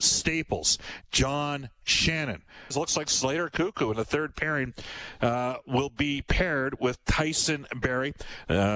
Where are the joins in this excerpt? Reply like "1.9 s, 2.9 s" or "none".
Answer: 1.0 s, 2.7 s